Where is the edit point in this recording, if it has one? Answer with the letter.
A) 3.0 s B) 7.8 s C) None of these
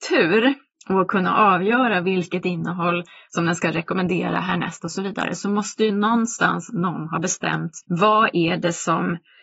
B